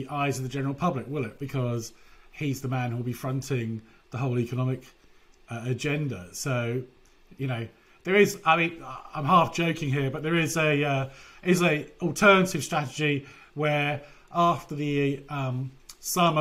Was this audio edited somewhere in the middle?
no; 0 cuts

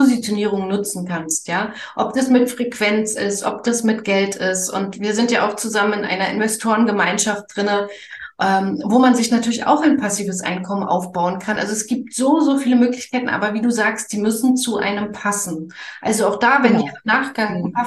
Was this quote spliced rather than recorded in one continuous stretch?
no; 0 cuts

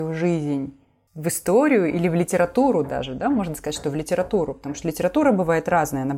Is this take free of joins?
yes; 0 cuts

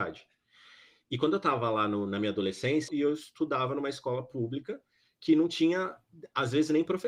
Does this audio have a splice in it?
yes; 1 cut; at 2.9 s

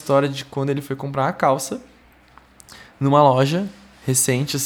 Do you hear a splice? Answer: no; 0 cuts

